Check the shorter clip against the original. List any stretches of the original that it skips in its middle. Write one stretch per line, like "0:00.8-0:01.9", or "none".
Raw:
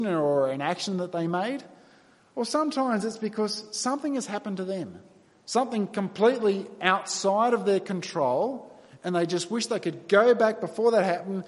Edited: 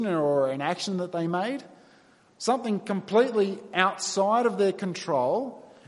0:02.3-0:05.4

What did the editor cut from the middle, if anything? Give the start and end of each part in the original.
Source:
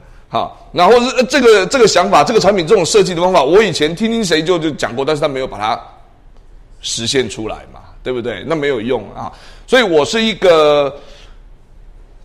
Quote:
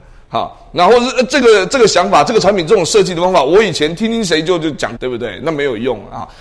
0:05.0-0:08.0

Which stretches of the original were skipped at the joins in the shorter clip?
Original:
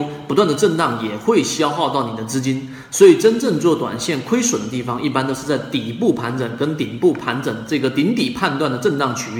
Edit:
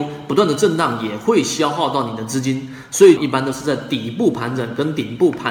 0:03.2-0:05.0

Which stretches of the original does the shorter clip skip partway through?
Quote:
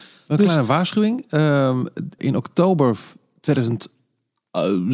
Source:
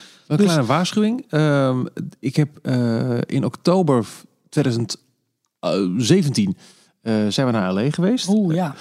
0:02.2-0:03.3

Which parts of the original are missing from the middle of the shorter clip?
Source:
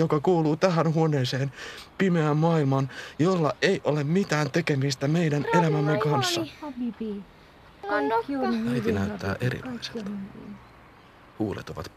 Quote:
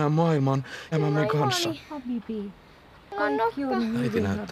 0:03.2-0:05.6

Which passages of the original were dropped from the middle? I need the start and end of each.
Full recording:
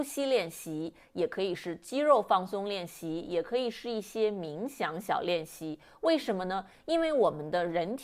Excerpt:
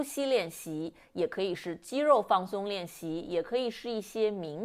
none

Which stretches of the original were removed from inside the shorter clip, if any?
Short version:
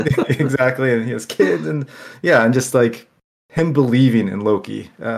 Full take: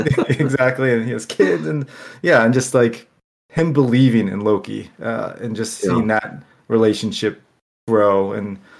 none

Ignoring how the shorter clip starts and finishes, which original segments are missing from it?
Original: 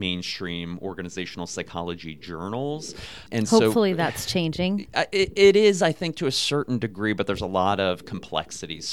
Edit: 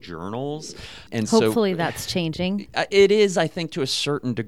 0:05.1-0:05.3

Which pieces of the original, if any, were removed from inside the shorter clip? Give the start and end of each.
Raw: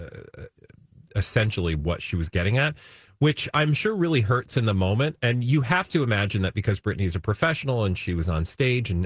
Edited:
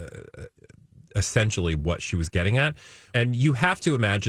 0:03.1-0:05.2

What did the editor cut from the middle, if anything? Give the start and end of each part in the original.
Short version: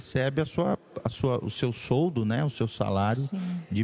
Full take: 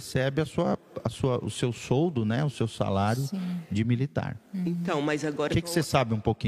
none

